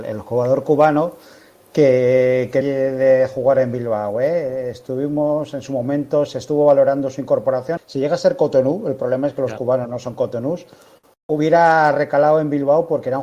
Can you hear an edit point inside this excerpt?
yes; 2 cuts; at 2.6 s, 7.8 s

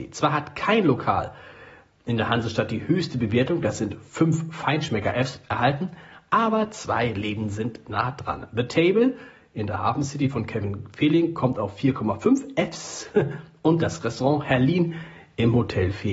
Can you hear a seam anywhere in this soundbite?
no; 0 cuts

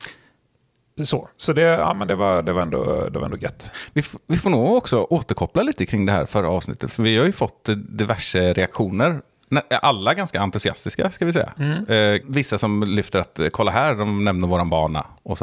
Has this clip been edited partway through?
yes; 1 cut; at 12.2 s

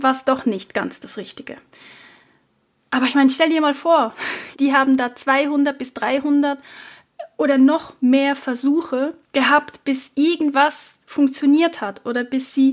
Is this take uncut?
no; 2 cuts; at 4.5 s, 9.2 s

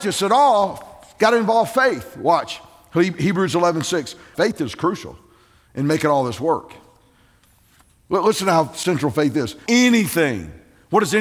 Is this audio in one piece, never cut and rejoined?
no; 2 cuts; at 4.3 s, 9.7 s

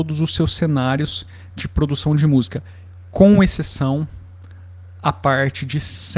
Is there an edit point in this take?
no; 0 cuts

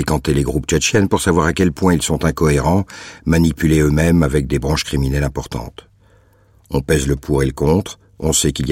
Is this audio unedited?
no; 1 cut; at 6.6 s

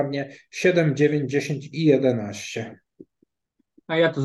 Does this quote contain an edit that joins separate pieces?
no; 0 cuts

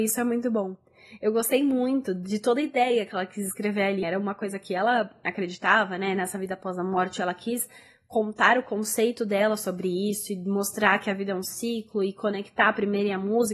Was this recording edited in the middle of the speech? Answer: yes; 1 cut; at 4.0 s

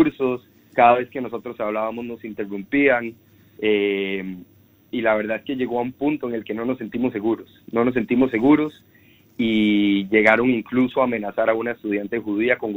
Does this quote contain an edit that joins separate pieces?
no; 0 cuts

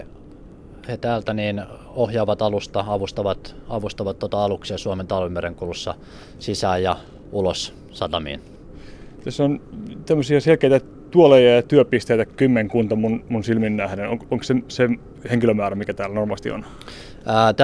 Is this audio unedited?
yes; 0 cuts

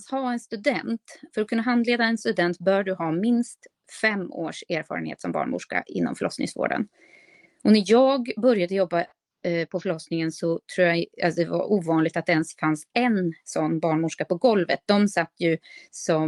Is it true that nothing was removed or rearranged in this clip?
yes; 0 cuts

